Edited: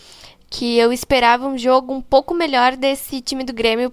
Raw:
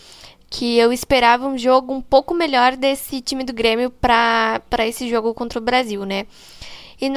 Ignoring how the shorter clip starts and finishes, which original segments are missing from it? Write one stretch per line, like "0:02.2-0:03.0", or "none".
none